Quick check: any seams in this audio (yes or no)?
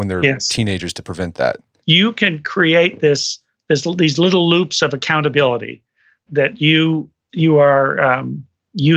yes